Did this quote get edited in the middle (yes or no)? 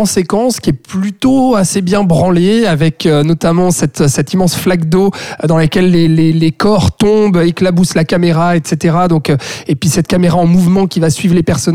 no